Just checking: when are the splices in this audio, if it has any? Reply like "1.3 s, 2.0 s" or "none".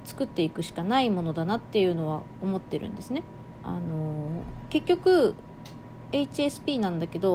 3.6 s